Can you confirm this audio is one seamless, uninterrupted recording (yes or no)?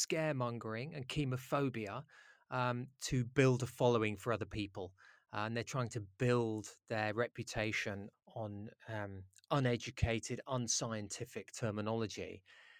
no